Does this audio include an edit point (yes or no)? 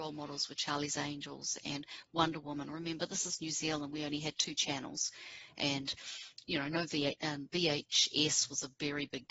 no